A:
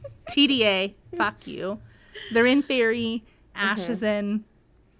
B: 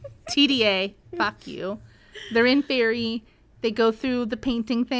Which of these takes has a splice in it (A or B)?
A